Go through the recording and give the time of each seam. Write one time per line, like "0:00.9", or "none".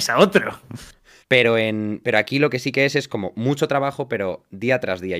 0:01.2